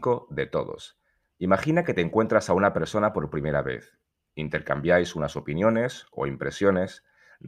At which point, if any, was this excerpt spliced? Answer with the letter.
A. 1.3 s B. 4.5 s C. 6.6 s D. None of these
D